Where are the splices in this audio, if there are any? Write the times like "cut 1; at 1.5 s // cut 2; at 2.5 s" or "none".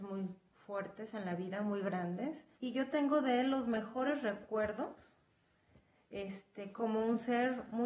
cut 1; at 2.5 s